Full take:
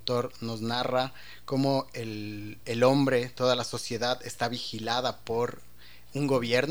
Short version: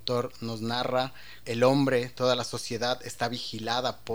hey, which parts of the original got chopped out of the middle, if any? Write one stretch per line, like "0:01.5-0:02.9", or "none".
0:01.4-0:02.6